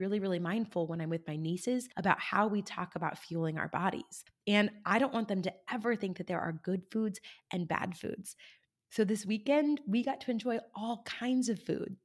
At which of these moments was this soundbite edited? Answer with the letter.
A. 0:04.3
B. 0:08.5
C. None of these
C